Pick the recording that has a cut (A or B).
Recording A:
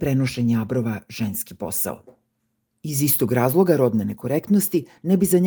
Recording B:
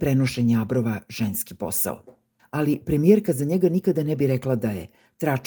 B